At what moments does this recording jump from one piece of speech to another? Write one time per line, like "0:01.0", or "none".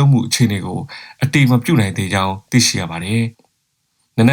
0:03.3